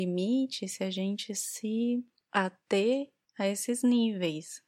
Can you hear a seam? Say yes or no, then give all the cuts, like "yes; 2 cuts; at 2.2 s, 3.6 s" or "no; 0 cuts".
no; 0 cuts